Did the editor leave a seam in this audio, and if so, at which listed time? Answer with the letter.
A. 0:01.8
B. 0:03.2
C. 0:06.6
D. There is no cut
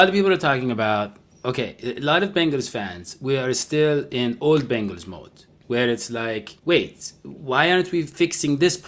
C